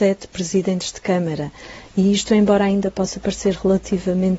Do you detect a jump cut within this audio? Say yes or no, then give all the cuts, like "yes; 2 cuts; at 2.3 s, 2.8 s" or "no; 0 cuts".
no; 0 cuts